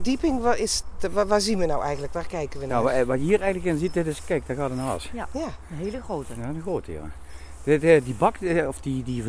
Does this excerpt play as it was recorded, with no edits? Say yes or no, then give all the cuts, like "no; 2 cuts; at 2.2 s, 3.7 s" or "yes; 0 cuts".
yes; 0 cuts